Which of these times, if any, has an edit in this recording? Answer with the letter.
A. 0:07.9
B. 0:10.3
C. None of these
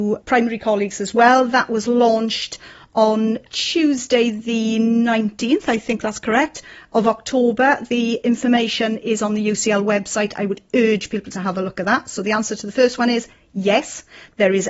C